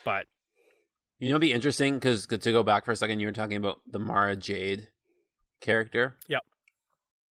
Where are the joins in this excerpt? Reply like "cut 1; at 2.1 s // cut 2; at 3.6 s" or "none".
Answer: none